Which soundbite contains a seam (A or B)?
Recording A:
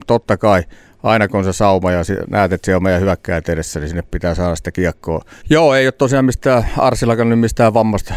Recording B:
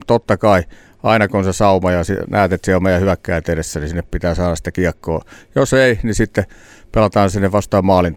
A